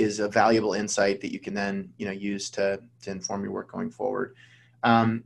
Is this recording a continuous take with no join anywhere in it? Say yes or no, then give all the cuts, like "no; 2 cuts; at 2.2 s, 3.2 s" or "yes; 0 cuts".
yes; 0 cuts